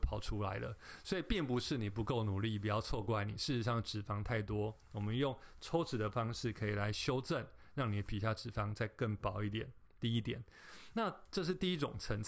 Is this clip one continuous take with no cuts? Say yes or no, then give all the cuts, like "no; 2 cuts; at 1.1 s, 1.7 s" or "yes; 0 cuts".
yes; 0 cuts